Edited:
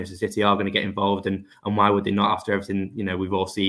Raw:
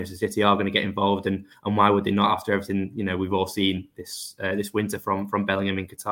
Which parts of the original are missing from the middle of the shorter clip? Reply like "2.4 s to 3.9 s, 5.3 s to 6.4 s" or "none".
none